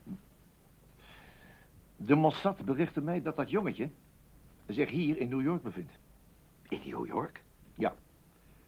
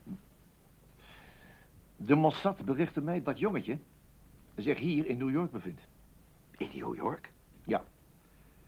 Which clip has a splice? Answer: second; 1 cut; at 3.2 s

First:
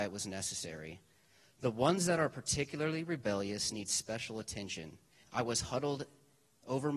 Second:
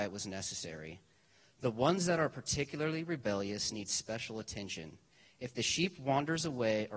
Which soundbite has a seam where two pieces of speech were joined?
first; 1 cut; at 5.2 s

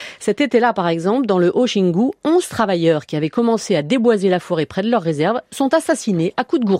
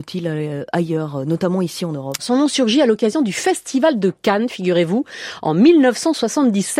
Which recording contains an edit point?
second; 1 cut; at 2.2 s

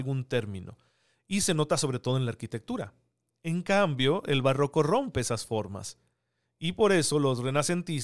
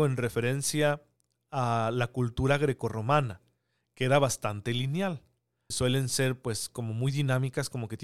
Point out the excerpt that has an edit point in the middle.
second; 1 cut; at 5.7 s

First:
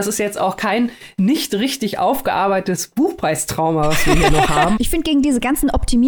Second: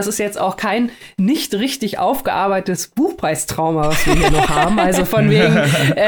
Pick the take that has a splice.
first; 1 cut; at 4.8 s

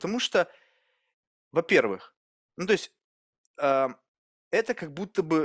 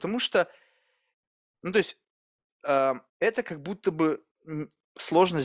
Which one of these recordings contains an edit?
second; 2 cuts; at 1.5 s, 3.1 s

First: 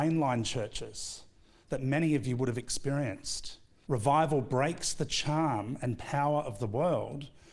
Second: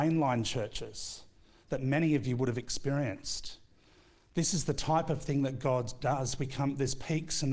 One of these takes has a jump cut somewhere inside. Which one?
first; 1 cut; at 3.9 s

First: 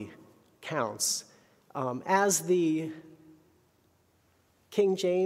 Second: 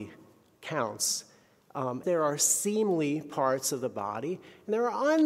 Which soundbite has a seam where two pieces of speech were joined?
second; 1 cut; at 2.0 s

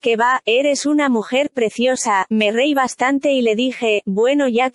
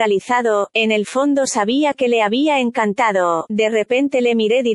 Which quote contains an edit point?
first; 1 cut; at 2.3 s

